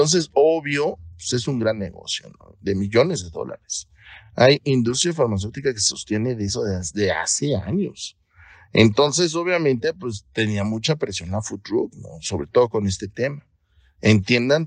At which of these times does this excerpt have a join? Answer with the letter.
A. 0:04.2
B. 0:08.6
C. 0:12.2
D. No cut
D